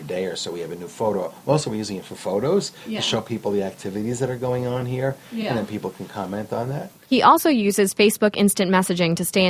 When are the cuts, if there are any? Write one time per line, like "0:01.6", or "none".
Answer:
none